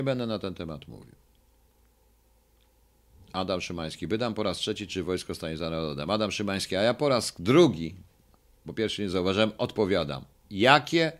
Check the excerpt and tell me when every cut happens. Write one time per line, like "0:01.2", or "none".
none